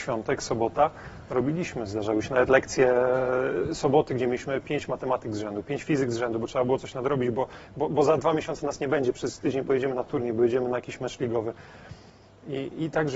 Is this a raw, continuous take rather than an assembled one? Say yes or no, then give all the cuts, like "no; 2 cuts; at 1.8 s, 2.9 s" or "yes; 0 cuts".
yes; 0 cuts